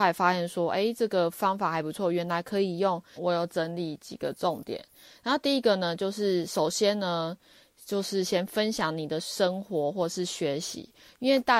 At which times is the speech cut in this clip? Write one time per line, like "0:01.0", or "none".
0:03.2